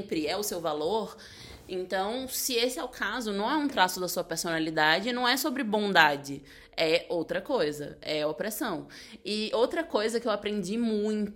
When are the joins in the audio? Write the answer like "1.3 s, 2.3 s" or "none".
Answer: none